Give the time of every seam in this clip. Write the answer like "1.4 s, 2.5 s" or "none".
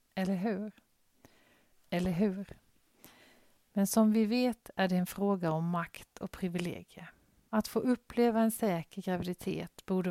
1.7 s, 7.5 s